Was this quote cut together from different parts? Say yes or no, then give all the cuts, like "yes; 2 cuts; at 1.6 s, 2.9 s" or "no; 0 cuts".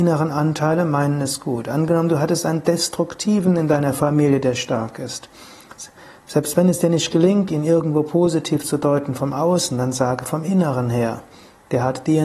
no; 0 cuts